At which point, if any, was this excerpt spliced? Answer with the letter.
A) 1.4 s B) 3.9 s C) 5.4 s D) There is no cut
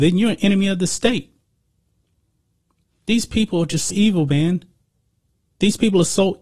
B